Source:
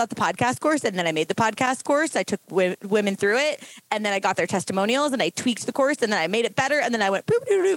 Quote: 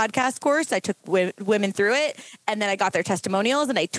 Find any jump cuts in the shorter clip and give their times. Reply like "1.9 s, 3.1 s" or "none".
none